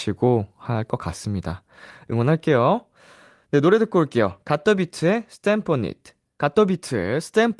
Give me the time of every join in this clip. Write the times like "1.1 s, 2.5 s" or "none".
none